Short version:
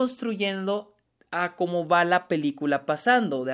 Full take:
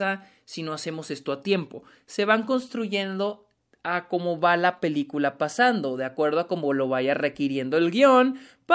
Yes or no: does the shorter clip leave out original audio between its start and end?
no